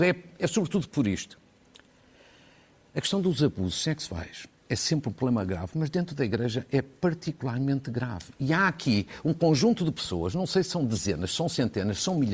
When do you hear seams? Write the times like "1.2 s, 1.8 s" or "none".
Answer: none